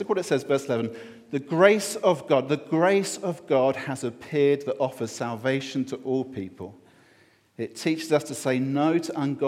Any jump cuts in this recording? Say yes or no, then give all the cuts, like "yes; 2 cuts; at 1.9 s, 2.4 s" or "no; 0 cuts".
no; 0 cuts